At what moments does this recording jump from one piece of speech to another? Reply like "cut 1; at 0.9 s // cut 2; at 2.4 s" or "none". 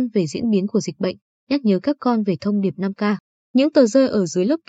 none

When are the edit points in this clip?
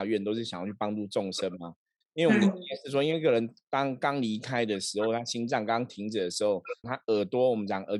cut 1; at 2.0 s // cut 2; at 6.8 s

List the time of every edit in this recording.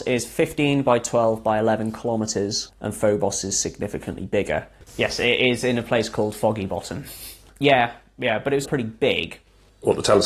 cut 1; at 4.8 s // cut 2; at 7.5 s // cut 3; at 8.6 s

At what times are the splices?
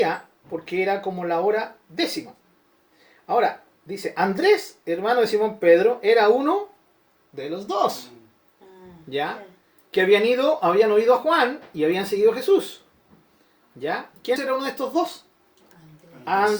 cut 1; at 14.4 s

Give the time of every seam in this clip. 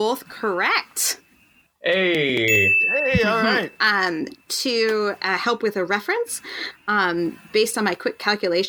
none

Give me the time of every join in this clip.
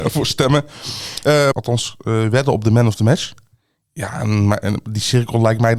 cut 1; at 1.5 s // cut 2; at 3.8 s

